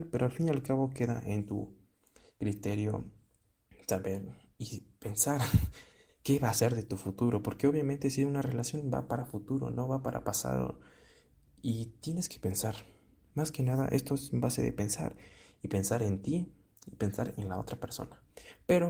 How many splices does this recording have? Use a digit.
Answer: 0